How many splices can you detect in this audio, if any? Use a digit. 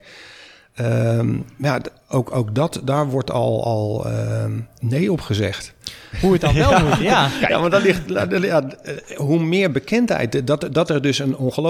1